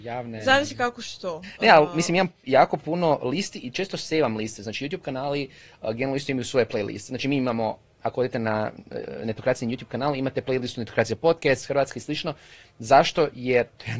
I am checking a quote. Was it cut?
no; 0 cuts

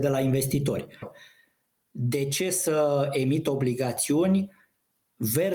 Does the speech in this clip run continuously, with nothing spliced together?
no; 1 cut; at 1.0 s

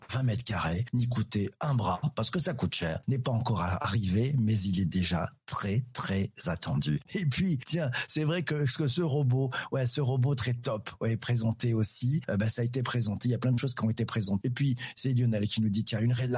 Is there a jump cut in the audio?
yes; 2 cuts; at 7.1 s, 14.4 s

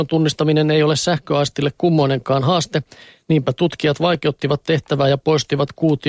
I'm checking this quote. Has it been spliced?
no; 0 cuts

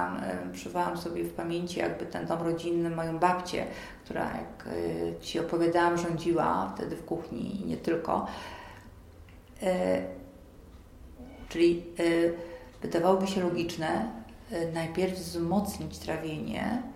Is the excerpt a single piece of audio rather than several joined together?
no; 1 cut; at 11.5 s

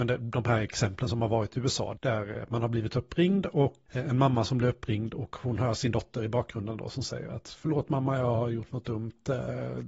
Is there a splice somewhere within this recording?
yes; 2 cuts; at 2.0 s, 3.9 s

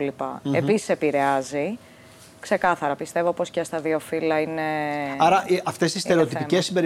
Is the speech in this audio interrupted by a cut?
no; 0 cuts

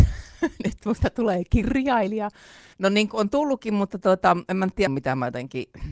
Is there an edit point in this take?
yes; 2 cuts; at 2.7 s, 4.9 s

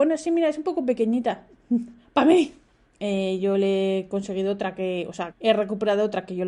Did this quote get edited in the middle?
yes; 2 cuts; at 2.8 s, 5.3 s

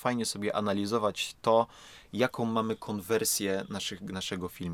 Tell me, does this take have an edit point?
no; 0 cuts

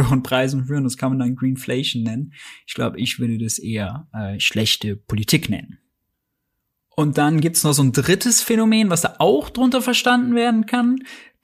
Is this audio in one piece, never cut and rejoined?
yes; 0 cuts

